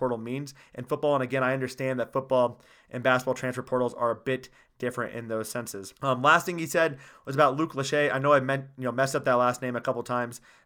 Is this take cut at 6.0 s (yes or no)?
yes